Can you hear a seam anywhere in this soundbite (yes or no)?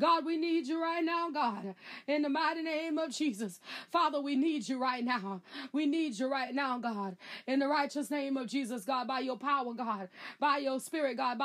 no